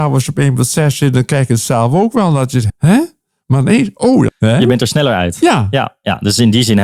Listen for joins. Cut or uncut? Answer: cut